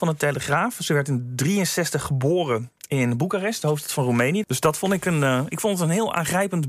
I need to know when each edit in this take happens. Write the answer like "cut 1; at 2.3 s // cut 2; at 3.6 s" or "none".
cut 1; at 4.4 s